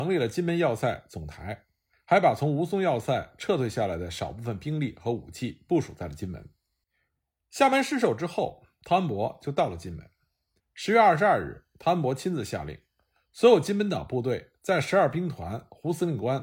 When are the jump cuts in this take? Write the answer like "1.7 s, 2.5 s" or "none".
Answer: 10.6 s